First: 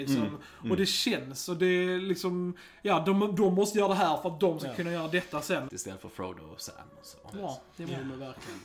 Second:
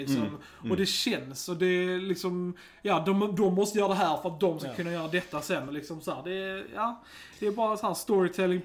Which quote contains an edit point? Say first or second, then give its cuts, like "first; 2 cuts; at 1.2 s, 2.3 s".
first; 2 cuts; at 5.7 s, 7.3 s